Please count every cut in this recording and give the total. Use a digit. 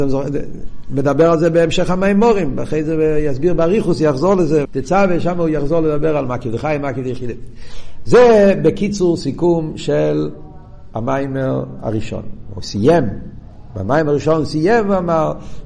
1